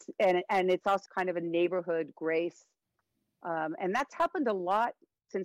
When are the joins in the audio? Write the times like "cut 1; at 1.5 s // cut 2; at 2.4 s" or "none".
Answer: cut 1; at 1.1 s